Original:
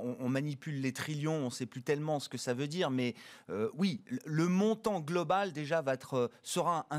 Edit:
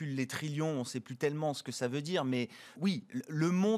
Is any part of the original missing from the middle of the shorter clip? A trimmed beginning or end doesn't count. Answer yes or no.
yes